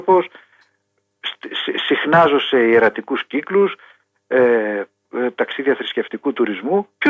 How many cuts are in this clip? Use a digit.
1